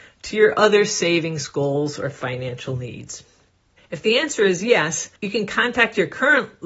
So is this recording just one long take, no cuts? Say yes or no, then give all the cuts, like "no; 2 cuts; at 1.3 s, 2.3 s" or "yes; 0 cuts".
no; 2 cuts; at 3.8 s, 5.2 s